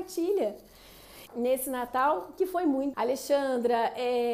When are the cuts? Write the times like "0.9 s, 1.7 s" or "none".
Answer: 1.3 s, 2.9 s